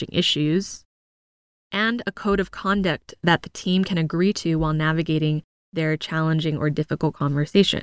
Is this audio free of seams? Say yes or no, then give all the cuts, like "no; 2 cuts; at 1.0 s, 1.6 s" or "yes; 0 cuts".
yes; 0 cuts